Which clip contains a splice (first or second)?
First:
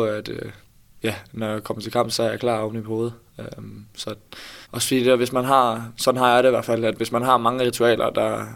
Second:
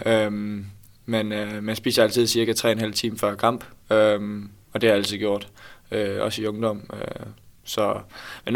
first